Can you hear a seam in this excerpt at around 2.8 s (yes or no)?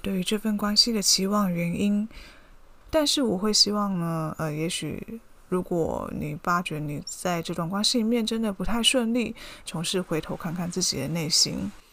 yes